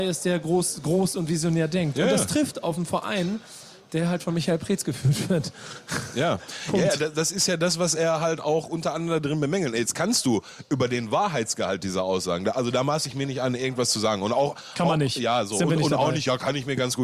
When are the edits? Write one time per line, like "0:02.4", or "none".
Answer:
none